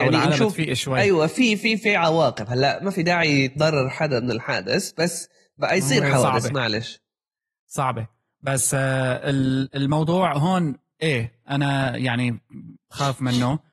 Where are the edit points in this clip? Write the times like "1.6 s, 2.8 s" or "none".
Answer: none